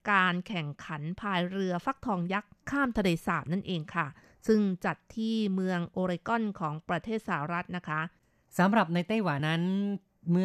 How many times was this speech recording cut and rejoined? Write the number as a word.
one